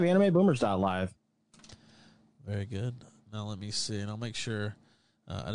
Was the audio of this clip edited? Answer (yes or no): no